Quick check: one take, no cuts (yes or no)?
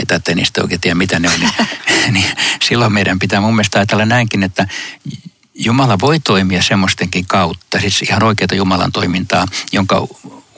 yes